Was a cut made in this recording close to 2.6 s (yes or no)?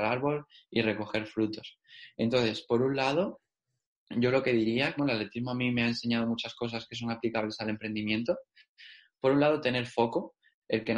no